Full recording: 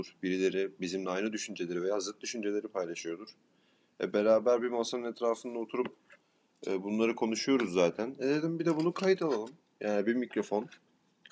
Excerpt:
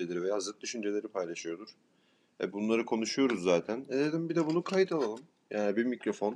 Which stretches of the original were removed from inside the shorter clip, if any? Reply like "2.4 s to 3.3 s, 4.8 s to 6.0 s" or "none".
4.1 s to 6.8 s